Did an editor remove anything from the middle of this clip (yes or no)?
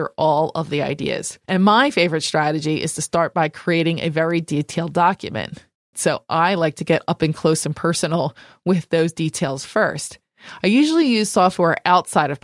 yes